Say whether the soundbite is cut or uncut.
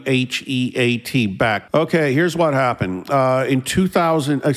cut